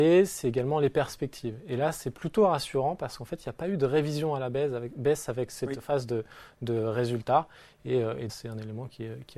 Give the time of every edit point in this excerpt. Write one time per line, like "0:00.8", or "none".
0:08.3